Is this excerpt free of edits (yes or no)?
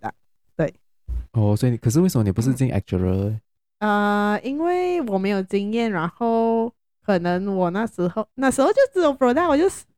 yes